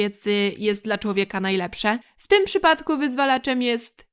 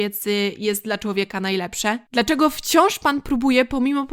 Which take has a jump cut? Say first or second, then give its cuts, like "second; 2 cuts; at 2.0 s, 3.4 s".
first; 1 cut; at 2.0 s